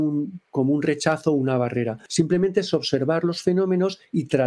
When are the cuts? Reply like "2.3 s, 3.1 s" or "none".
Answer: none

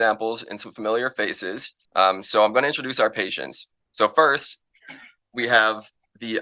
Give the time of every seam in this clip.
1.8 s, 3.8 s

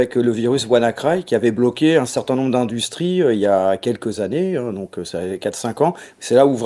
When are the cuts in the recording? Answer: none

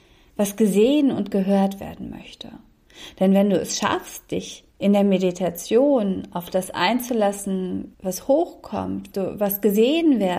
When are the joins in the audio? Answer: 4.7 s, 7.9 s, 9.1 s

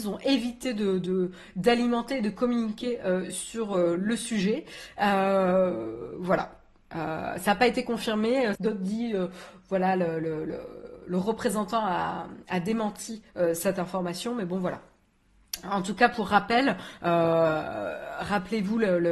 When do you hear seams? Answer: 8.5 s

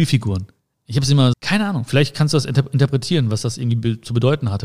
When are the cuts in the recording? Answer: 1.3 s

